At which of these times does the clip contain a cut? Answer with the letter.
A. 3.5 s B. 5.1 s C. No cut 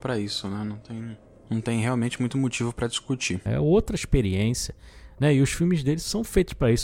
A